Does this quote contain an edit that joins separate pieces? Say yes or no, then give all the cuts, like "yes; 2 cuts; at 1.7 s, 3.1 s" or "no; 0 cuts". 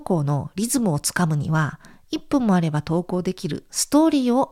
no; 0 cuts